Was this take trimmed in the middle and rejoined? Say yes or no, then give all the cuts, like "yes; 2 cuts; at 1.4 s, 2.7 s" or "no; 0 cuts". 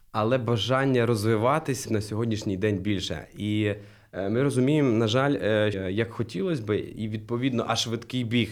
yes; 2 cuts; at 1.8 s, 5.7 s